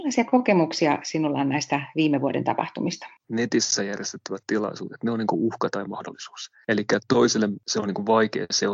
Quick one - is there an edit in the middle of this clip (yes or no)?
yes